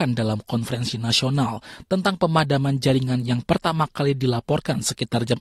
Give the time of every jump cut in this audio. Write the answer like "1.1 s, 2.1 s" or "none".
none